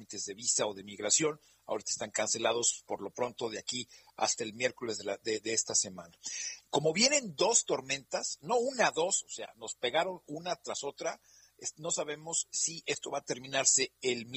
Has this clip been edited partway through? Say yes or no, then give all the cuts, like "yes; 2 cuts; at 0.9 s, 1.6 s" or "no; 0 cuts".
no; 0 cuts